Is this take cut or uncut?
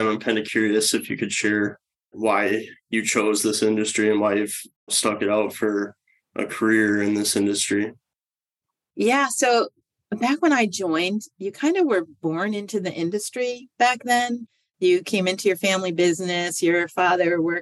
uncut